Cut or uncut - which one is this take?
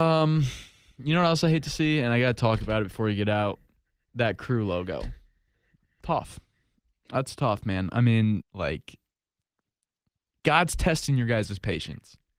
cut